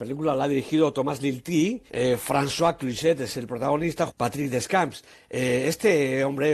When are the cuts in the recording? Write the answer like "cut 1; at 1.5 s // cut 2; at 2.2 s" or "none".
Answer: cut 1; at 1.9 s // cut 2; at 4.1 s